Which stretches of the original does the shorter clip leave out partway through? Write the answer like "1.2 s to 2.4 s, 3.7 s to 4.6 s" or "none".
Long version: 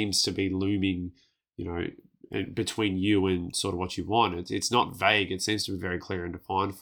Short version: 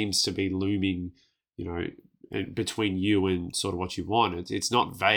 none